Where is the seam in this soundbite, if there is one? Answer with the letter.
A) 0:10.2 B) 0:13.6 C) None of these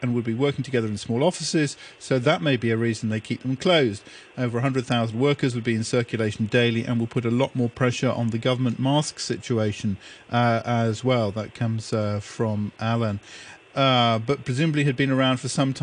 B